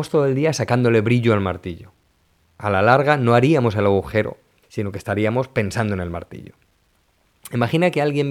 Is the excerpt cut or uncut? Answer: cut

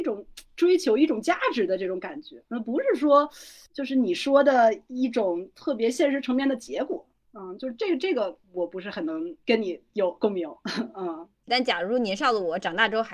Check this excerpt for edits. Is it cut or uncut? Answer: cut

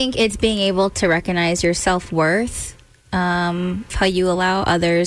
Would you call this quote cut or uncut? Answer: cut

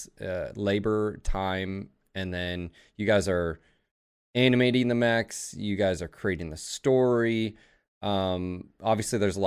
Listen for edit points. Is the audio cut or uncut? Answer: uncut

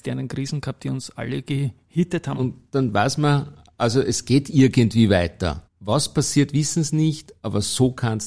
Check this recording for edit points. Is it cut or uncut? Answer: cut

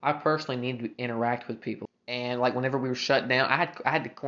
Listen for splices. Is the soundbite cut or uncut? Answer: cut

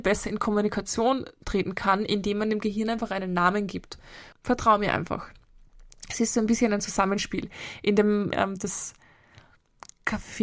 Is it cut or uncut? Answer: cut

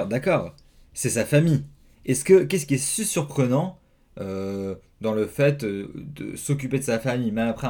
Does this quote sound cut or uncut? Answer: uncut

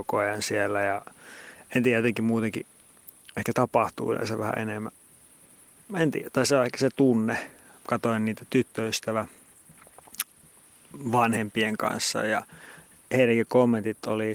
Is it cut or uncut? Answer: cut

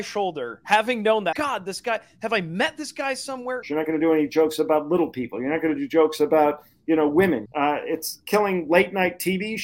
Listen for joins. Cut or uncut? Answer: cut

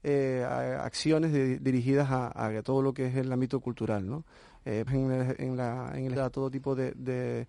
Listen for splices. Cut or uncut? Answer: cut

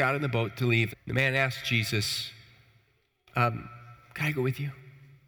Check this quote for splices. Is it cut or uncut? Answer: cut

